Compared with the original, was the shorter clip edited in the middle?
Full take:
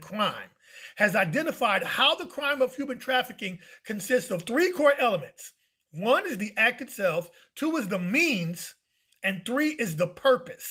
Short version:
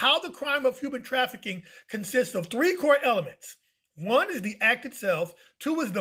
no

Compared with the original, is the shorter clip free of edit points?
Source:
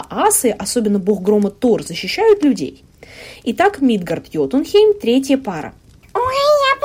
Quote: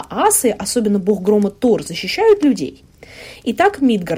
yes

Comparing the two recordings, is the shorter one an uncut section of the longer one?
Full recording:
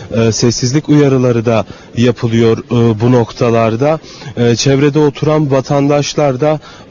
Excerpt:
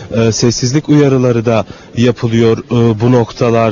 yes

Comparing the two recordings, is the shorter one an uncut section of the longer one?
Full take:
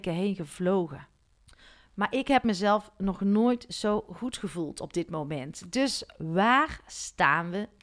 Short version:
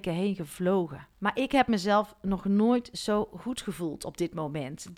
no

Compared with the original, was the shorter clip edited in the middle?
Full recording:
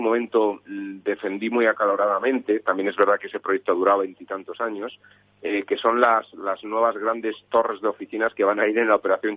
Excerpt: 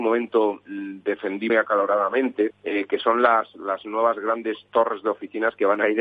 yes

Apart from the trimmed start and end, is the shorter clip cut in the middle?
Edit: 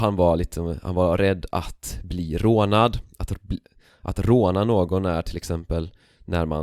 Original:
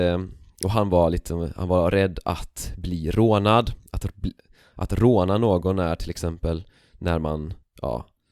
no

